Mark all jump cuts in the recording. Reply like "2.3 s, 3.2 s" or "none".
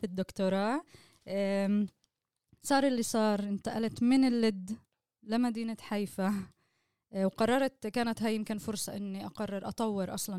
none